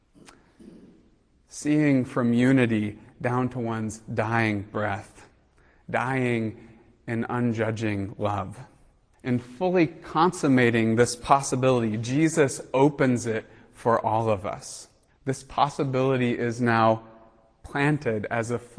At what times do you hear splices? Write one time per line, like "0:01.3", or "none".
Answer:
0:09.1
0:15.1